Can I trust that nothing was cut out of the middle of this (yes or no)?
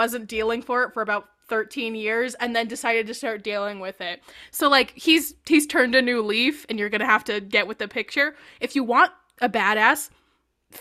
yes